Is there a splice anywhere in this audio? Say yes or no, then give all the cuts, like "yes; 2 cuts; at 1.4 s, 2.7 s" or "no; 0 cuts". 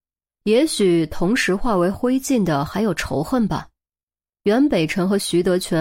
no; 0 cuts